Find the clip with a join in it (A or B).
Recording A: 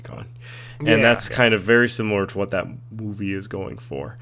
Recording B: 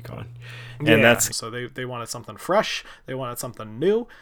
B